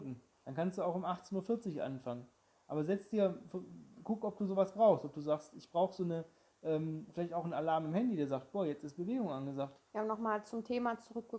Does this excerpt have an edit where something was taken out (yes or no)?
yes